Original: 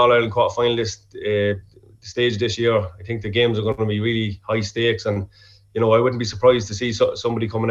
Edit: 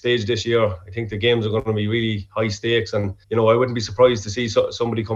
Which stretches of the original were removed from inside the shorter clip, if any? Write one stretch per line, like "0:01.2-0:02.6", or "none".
0:05.4-0:05.7